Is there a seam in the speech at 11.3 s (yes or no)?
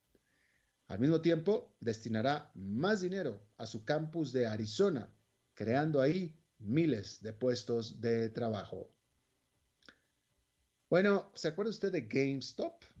yes